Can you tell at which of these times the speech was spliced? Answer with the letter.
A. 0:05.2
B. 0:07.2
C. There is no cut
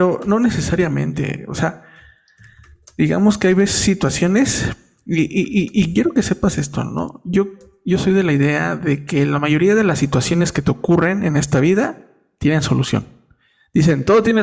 C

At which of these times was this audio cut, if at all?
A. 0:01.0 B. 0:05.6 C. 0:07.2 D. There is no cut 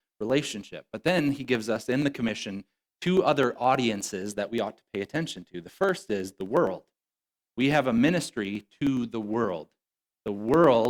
D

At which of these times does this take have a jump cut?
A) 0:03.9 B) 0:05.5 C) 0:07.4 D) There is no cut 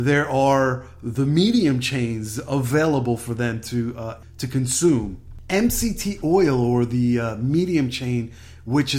D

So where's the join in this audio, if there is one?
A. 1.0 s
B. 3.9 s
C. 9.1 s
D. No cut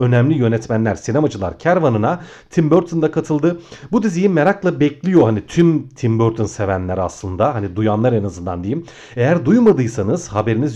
D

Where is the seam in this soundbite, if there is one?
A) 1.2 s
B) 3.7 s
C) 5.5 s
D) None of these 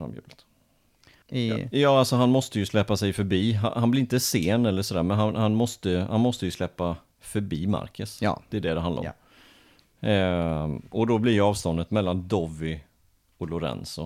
A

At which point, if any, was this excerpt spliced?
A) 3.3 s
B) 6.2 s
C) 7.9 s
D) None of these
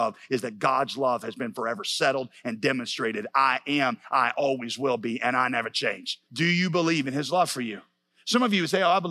B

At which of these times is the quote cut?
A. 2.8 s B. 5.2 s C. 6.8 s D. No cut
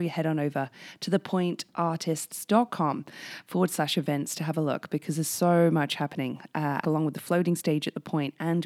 C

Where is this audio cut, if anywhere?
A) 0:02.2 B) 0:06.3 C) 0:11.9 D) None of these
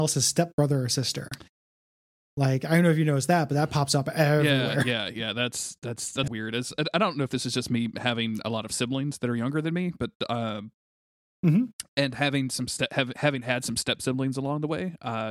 B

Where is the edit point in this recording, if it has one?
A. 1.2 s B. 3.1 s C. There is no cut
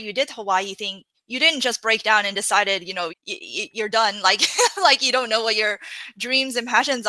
B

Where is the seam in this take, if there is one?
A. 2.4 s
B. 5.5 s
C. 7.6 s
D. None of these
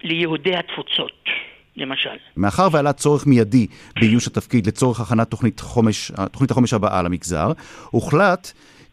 A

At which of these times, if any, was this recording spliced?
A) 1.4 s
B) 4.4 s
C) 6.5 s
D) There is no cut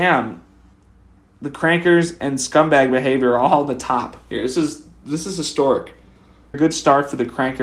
C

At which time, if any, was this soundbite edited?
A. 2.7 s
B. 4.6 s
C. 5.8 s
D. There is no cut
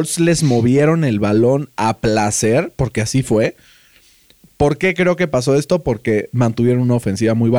D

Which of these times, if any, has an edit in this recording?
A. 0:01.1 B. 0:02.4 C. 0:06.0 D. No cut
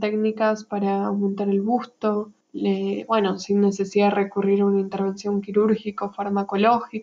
B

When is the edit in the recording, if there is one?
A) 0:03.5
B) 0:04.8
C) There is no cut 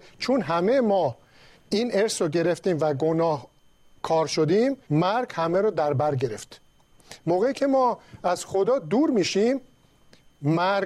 B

